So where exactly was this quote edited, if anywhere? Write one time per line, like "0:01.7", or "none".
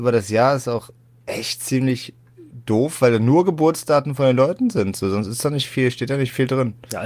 none